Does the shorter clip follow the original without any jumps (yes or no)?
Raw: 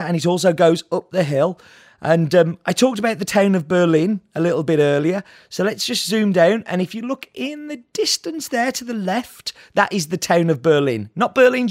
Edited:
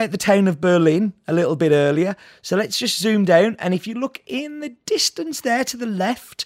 yes